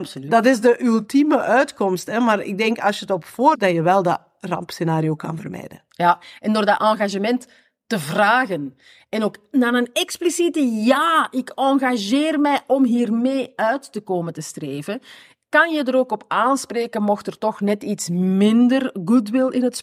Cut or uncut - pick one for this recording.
cut